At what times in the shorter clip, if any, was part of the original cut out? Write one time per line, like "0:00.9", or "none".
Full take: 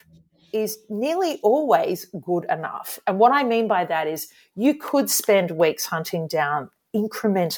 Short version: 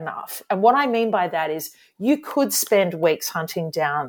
none